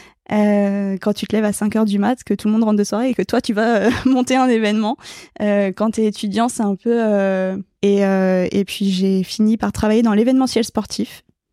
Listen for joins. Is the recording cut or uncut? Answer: cut